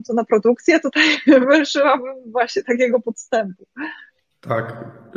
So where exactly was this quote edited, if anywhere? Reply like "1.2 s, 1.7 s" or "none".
none